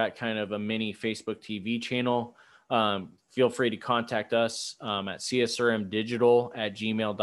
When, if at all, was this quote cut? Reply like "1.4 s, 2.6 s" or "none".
none